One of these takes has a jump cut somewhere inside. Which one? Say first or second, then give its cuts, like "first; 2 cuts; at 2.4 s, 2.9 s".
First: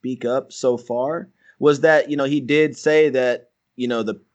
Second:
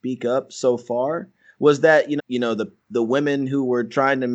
second; 1 cut; at 2.2 s